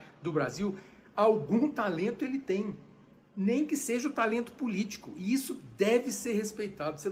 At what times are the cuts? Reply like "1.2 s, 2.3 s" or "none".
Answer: none